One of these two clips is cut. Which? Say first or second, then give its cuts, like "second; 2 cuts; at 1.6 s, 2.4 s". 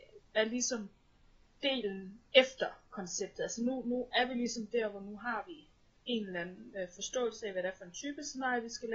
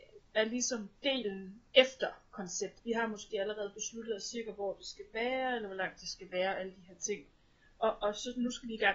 second; 2 cuts; at 0.9 s, 2.8 s